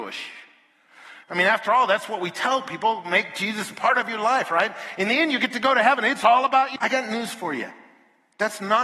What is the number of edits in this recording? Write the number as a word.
two